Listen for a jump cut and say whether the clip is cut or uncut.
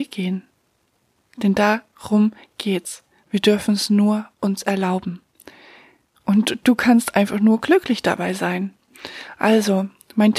cut